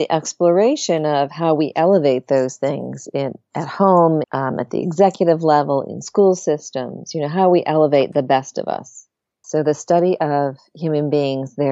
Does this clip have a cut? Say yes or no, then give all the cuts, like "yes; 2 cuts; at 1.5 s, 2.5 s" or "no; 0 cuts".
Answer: yes; 2 cuts; at 4.2 s, 9.4 s